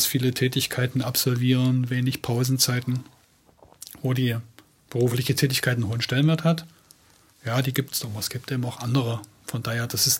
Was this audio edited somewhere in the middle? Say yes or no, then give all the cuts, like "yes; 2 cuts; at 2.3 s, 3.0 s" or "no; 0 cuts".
no; 0 cuts